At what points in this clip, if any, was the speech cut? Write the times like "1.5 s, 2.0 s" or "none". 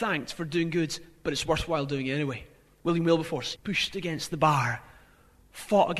3.6 s